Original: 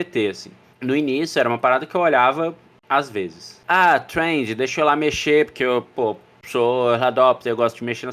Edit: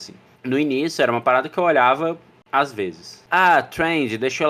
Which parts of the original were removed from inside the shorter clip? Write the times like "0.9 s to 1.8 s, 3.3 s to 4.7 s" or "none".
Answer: none